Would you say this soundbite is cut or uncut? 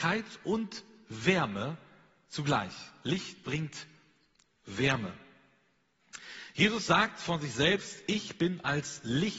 uncut